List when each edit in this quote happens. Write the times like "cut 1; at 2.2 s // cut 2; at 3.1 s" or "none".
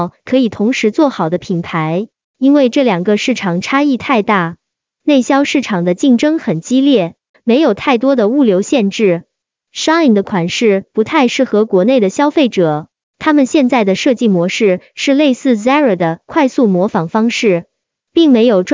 cut 1; at 7.3 s